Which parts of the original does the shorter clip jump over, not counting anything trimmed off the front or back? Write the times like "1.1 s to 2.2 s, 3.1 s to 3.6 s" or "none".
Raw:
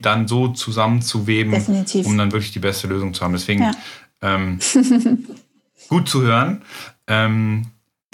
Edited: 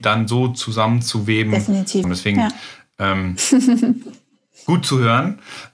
2.0 s to 3.3 s